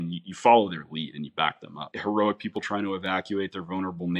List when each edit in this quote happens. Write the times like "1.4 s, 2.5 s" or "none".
1.9 s